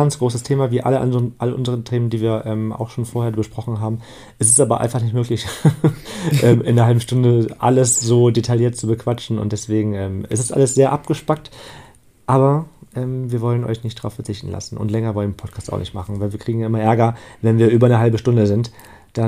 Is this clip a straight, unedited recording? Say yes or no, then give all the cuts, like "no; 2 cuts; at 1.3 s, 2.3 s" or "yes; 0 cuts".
yes; 0 cuts